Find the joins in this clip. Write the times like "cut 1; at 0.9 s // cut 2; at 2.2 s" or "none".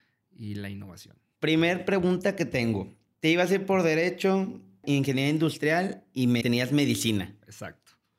cut 1; at 1.4 s // cut 2; at 6.4 s